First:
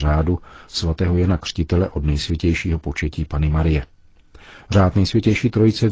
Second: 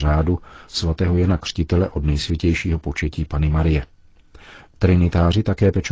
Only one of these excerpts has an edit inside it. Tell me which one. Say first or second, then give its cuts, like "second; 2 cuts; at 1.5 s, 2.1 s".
second; 1 cut; at 4.7 s